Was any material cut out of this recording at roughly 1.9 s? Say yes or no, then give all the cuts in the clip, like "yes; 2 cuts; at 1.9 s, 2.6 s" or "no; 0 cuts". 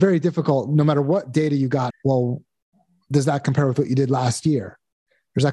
yes; 1 cut; at 1.9 s